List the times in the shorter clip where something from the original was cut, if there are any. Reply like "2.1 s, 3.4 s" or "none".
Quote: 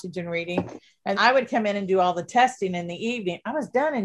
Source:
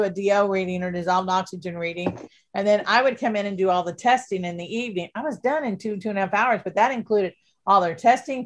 1.1 s